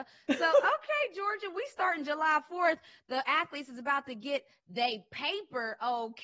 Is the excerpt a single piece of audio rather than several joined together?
yes; 0 cuts

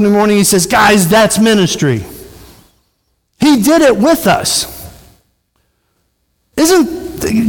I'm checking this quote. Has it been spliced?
no; 0 cuts

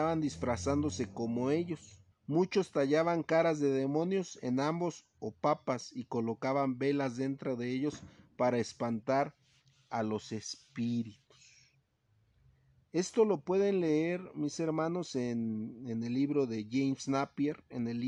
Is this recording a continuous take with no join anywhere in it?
no; 1 cut; at 2.1 s

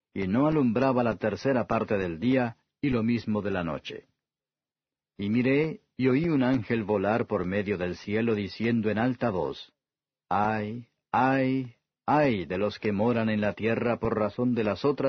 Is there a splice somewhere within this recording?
no; 0 cuts

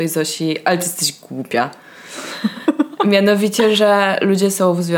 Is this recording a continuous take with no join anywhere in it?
yes; 0 cuts

